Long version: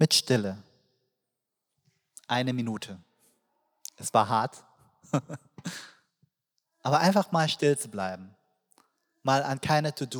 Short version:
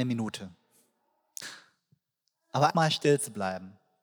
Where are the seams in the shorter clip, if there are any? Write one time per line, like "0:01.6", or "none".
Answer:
0:01.4
0:02.7